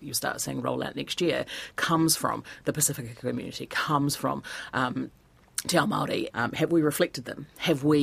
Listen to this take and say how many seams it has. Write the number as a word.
one